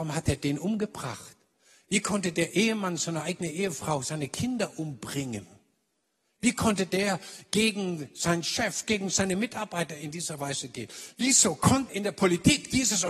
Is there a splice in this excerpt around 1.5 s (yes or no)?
no